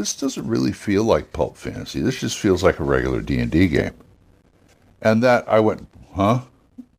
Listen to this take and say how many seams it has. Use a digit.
0